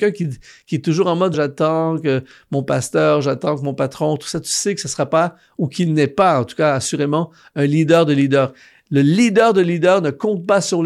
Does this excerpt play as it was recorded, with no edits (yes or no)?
no